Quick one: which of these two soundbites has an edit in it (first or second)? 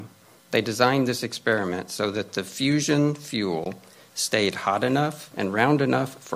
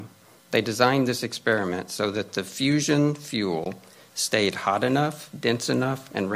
first